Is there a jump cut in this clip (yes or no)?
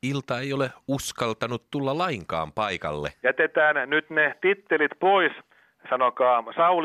yes